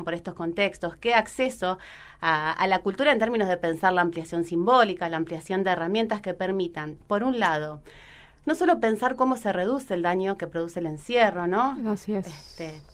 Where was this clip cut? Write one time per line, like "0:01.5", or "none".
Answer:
none

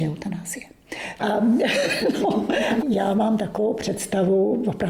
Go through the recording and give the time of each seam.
0:01.2
0:02.8

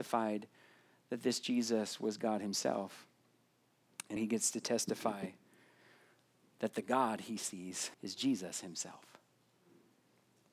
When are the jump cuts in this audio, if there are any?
0:04.2
0:07.9

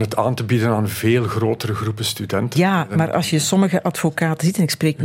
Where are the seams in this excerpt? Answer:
0:02.5

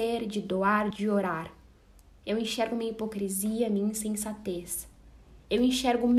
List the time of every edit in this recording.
0:00.9

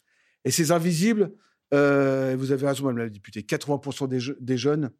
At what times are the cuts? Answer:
none

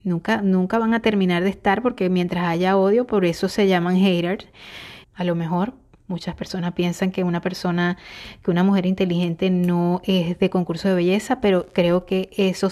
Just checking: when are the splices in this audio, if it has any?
0:05.0

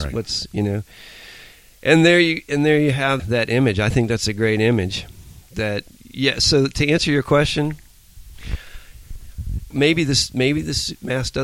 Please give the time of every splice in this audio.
0:03.2
0:09.7

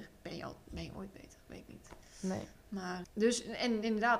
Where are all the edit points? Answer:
0:03.0

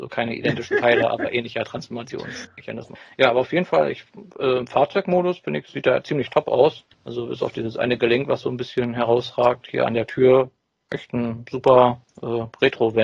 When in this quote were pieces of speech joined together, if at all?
none

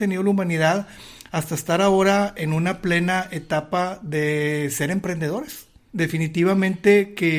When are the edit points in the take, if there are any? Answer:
0:05.9

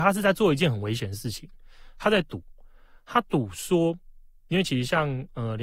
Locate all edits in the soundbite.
none

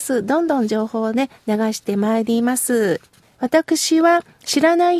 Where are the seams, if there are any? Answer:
0:03.3

